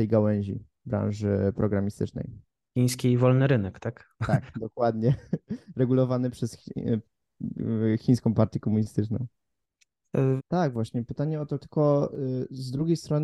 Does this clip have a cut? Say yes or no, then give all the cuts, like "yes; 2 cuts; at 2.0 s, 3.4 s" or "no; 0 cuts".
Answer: yes; 2 cuts; at 10.4 s, 11.6 s